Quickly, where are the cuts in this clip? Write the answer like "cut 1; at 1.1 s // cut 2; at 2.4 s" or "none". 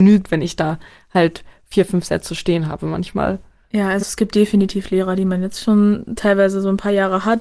none